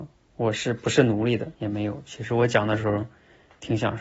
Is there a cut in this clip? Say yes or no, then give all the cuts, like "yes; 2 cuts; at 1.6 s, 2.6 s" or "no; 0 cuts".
yes; 1 cut; at 1.5 s